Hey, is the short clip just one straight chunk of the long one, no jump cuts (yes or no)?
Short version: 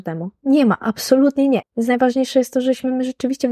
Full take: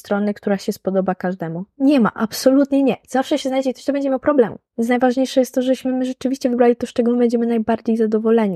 no